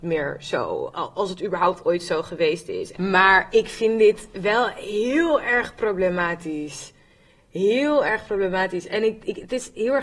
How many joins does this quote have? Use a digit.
1